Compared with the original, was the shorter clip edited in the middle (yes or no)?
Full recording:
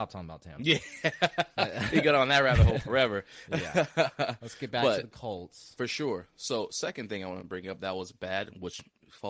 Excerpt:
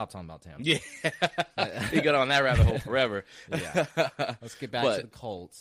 no